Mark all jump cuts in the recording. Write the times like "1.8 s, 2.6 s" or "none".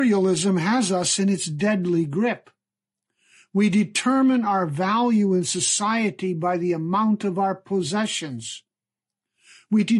none